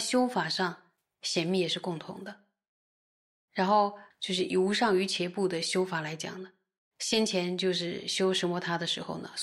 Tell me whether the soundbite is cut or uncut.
cut